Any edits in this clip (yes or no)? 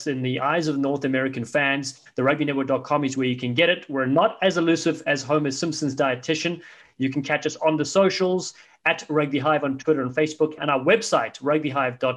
yes